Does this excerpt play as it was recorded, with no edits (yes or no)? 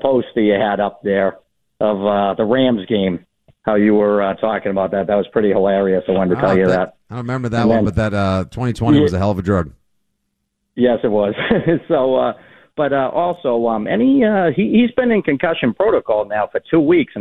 yes